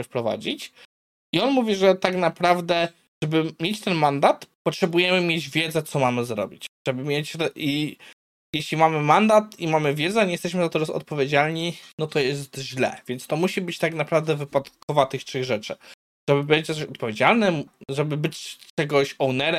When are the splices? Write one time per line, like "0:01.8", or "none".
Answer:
0:04.5